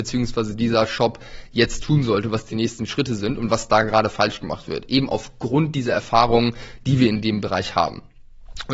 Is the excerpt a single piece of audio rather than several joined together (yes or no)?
yes